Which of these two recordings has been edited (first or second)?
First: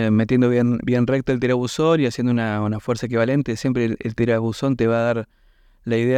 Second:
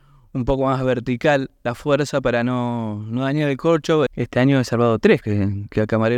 second